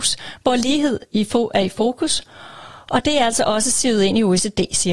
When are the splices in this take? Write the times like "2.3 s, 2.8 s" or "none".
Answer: none